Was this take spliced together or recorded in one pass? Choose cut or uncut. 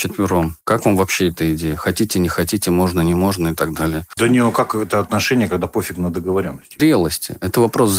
cut